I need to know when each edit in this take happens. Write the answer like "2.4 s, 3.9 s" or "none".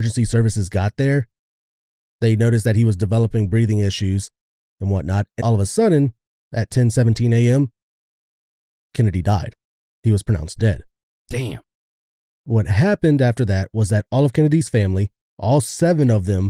5.4 s